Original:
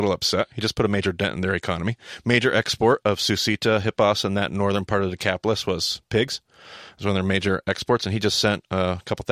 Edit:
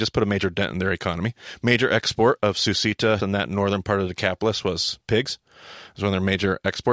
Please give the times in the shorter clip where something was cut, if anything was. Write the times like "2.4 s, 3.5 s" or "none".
3.2 s